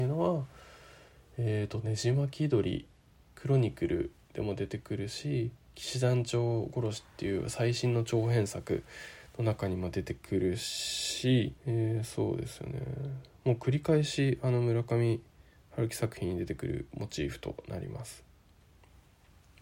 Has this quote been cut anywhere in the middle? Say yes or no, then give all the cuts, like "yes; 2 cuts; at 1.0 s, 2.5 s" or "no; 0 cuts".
yes; 1 cut; at 11.6 s